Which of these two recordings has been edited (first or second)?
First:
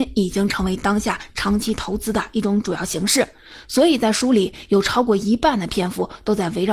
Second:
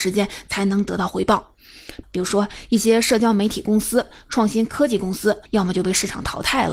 second